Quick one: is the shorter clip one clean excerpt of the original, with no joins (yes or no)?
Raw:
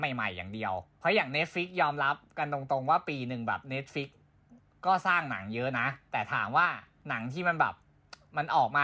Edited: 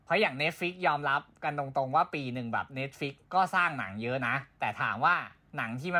no